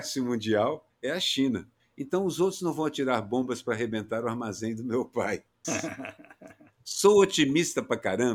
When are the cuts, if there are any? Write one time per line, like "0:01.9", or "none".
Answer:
0:01.8
0:05.6